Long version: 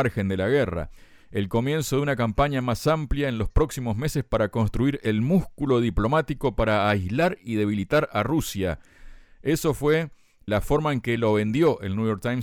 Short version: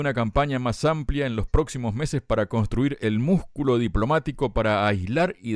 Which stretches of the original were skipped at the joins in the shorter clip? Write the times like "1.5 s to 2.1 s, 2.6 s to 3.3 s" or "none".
none